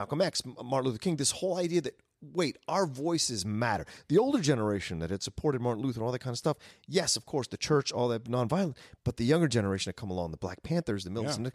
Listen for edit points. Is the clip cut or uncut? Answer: uncut